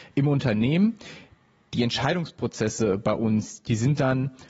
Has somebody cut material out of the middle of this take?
no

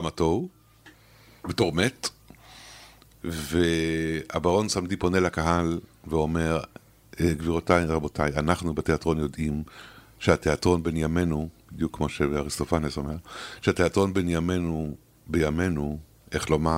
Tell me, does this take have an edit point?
no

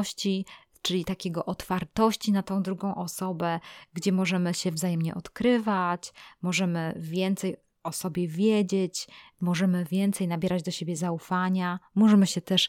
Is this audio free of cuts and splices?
yes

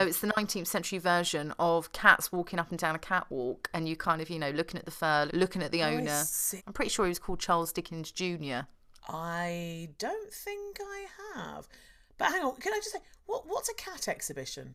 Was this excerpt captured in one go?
no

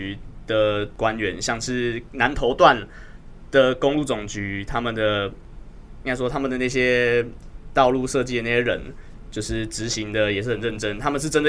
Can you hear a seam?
no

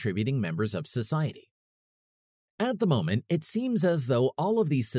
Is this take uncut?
yes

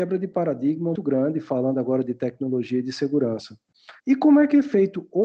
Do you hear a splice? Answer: yes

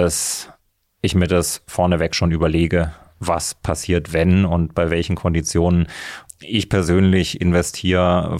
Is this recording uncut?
no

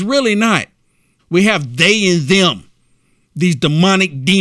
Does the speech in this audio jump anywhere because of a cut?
yes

